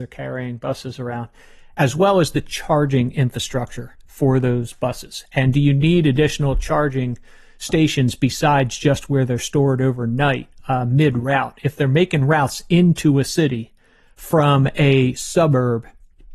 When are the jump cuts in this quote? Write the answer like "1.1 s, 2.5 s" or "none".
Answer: none